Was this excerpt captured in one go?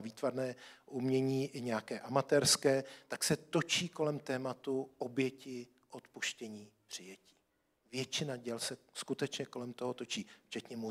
yes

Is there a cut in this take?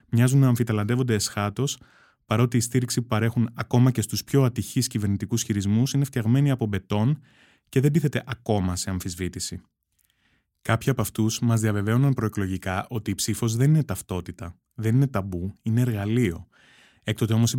no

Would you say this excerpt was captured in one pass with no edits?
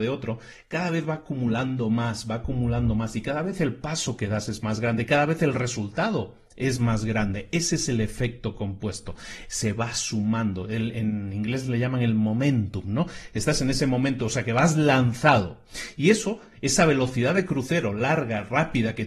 yes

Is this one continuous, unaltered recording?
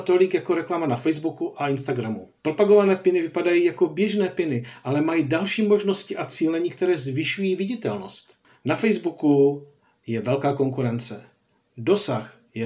no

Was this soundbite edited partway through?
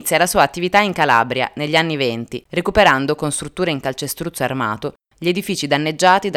yes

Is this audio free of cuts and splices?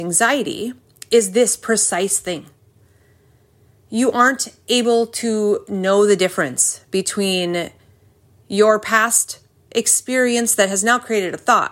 yes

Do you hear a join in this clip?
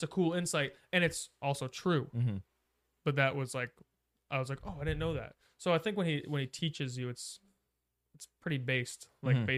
no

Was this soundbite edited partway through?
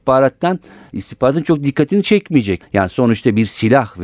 yes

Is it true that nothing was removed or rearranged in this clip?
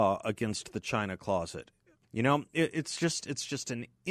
no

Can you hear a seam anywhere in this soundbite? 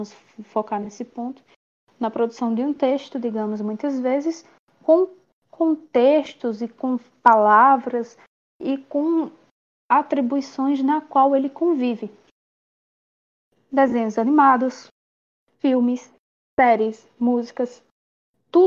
no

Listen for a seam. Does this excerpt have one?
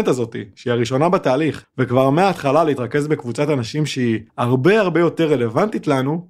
yes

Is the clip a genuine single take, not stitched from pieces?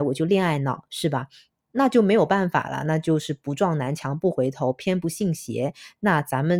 yes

